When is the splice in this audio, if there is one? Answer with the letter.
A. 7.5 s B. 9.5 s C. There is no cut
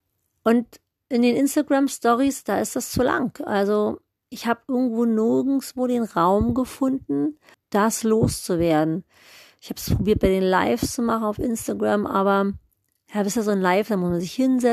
A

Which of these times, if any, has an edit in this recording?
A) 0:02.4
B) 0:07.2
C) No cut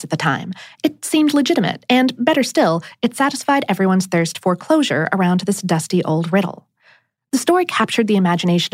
C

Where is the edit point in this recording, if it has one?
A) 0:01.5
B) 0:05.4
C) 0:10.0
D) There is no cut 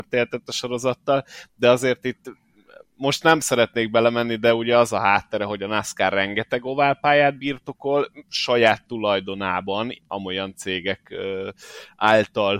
C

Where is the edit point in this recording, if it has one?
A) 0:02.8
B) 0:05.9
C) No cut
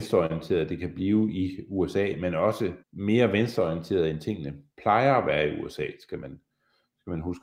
A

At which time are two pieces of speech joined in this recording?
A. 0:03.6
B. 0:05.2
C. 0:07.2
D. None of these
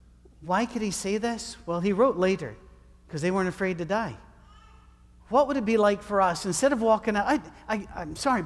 B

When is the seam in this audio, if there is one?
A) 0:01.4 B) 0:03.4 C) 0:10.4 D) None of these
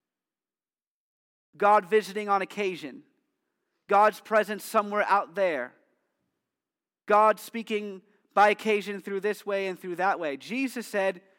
D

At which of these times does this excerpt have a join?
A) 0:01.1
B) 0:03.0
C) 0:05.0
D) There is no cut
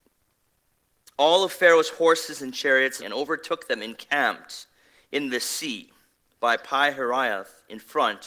B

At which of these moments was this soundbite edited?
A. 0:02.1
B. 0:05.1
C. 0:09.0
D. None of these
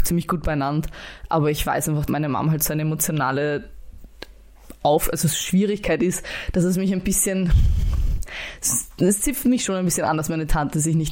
A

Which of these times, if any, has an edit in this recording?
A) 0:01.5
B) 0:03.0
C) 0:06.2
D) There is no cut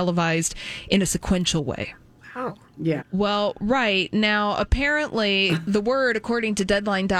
B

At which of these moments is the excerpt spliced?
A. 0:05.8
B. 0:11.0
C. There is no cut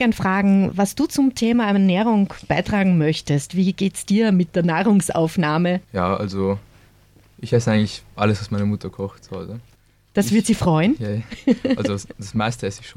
A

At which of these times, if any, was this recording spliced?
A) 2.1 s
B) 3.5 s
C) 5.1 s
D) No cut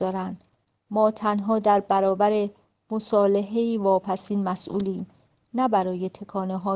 D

